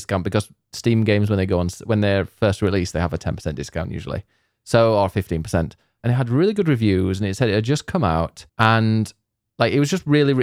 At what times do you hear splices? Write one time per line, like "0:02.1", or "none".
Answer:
0:06.0
0:08.5